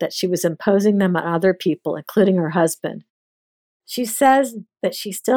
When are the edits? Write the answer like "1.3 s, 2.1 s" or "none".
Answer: 3.7 s